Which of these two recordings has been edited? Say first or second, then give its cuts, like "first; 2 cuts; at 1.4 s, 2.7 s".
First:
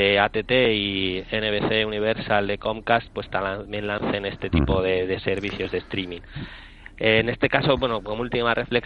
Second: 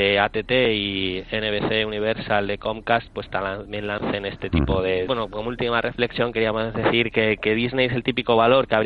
second; 1 cut; at 5.1 s